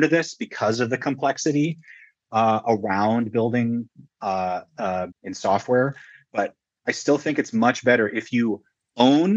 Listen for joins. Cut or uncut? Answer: cut